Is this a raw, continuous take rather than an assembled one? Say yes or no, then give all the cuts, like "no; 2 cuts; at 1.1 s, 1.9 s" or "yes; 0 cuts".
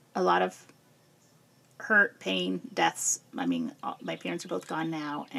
no; 1 cut; at 4.0 s